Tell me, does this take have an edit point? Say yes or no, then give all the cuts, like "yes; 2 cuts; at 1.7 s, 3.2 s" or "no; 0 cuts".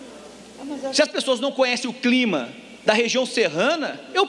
no; 0 cuts